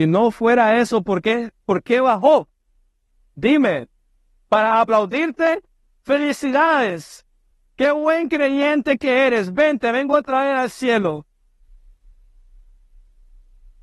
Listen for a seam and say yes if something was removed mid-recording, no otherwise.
no